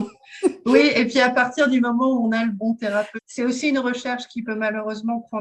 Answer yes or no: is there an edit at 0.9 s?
no